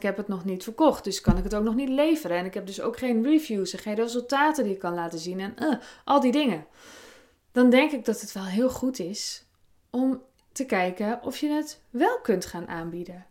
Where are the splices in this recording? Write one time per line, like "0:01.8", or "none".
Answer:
none